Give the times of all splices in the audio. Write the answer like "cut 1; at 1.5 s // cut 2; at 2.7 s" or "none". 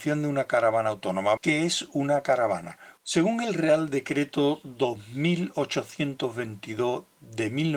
cut 1; at 1.4 s // cut 2; at 3.0 s